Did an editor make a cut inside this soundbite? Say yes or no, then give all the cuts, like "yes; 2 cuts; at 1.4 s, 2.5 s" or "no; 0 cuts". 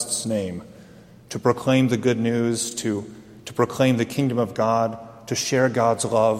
no; 0 cuts